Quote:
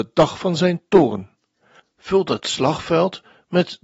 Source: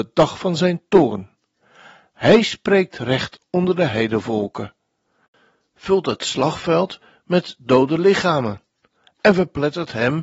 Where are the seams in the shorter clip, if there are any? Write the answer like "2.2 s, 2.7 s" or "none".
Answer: 1.8 s